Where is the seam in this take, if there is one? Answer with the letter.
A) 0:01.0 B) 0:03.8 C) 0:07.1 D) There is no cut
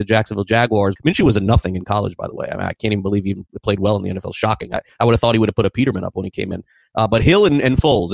A